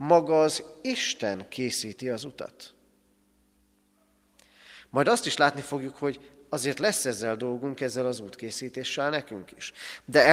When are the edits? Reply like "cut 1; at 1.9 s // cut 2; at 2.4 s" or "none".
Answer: none